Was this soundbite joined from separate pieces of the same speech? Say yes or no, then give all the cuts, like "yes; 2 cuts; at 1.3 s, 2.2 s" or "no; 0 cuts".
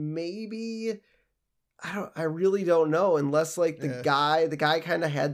no; 0 cuts